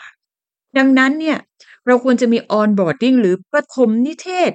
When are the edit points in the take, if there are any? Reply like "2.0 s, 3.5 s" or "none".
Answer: none